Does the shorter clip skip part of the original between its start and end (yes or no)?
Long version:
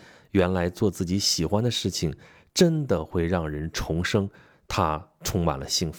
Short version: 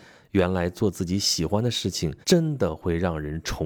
yes